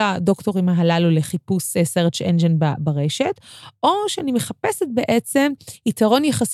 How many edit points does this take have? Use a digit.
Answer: 0